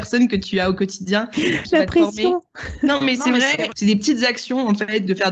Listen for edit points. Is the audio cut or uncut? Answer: cut